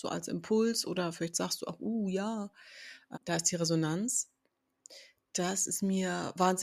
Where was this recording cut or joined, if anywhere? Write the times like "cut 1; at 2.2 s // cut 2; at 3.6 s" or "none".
cut 1; at 3.1 s

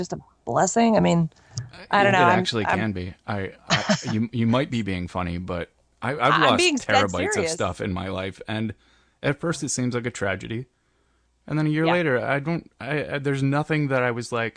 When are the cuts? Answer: none

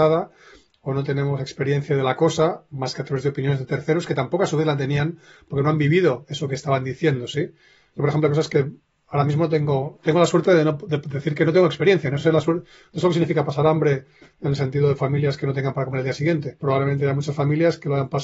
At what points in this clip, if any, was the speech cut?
none

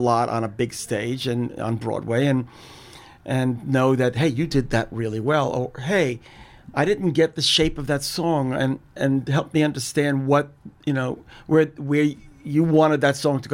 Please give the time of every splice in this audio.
none

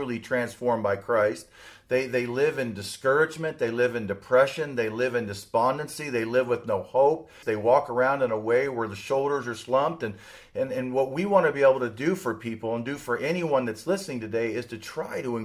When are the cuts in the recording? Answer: cut 1; at 7.4 s

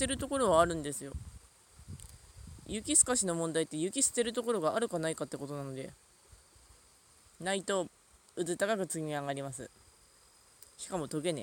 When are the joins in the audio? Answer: none

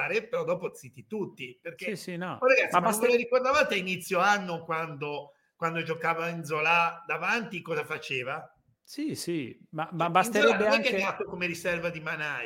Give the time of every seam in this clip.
none

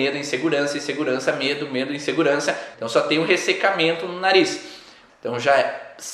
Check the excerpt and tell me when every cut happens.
cut 1; at 2.7 s // cut 2; at 5.1 s

